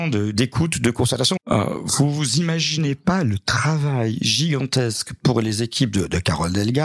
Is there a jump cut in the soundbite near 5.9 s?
no; 1 cut; at 1.4 s

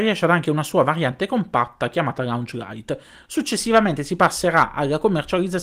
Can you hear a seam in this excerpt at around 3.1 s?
no; 0 cuts

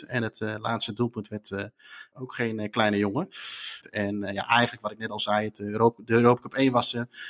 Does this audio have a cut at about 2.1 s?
yes; 2 cuts; at 2.1 s, 3.8 s

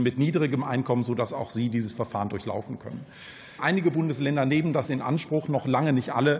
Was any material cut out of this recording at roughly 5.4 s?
no; 1 cut; at 3.6 s

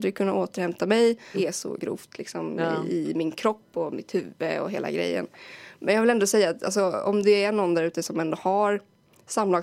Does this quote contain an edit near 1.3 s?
yes; 1 cut; at 1.3 s

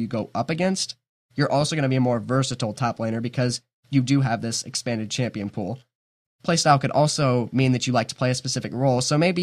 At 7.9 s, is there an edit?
no; 1 cut; at 6.2 s

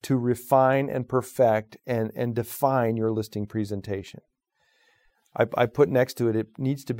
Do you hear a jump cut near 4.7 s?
no; 0 cuts

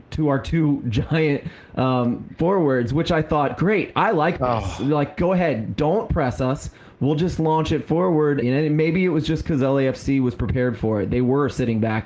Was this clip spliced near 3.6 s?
no; 1 cut; at 8.4 s

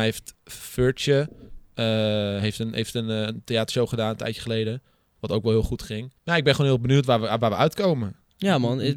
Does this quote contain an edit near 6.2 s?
yes; 1 cut; at 6.2 s

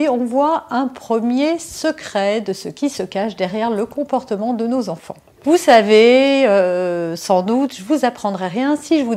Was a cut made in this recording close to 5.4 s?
no; 0 cuts

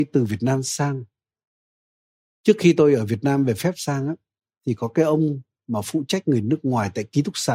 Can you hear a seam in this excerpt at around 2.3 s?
no; 0 cuts

